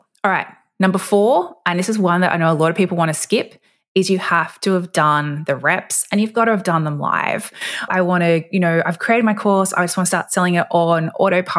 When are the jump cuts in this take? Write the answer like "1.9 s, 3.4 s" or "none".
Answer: 7.9 s